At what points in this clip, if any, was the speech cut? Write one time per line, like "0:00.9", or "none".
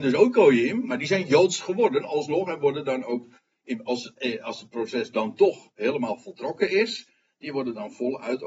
none